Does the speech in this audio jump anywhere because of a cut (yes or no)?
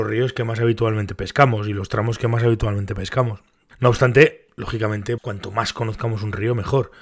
yes